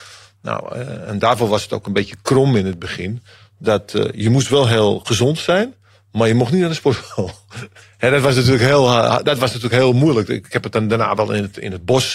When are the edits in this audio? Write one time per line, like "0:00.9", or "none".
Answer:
none